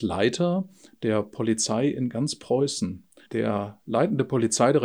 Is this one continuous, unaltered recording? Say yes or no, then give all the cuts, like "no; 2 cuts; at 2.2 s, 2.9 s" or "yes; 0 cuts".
no; 1 cut; at 3.3 s